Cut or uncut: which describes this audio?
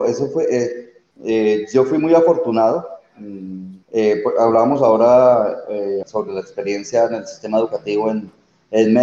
cut